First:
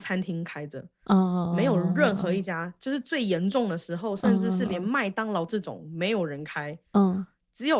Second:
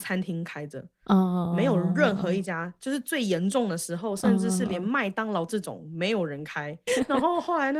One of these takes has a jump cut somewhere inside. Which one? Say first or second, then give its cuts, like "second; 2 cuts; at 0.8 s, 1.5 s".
second; 1 cut; at 6.9 s